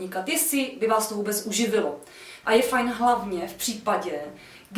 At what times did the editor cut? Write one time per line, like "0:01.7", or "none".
0:02.4

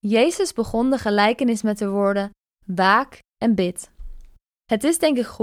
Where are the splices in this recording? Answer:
0:02.5

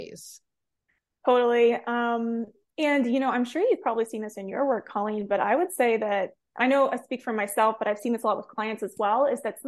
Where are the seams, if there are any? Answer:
none

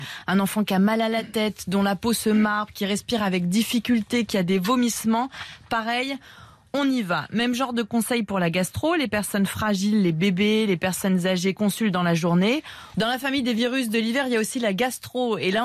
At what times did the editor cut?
0:12.9

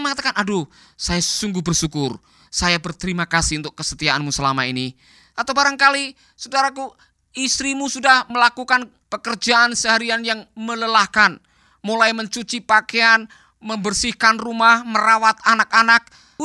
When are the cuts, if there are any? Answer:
0:05.3

